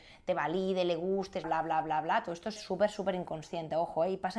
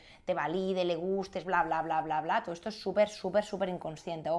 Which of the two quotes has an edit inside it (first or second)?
first